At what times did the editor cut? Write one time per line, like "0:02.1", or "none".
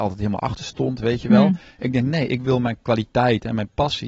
none